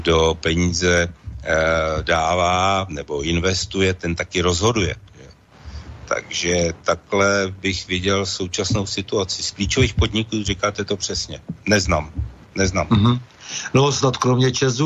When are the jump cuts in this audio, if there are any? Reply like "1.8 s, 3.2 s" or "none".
none